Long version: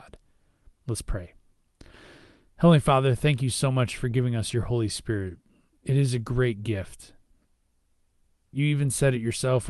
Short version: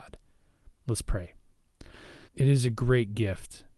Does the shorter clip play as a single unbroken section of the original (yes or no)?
no